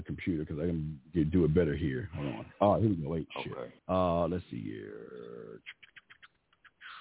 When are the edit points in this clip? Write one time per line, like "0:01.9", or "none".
0:03.8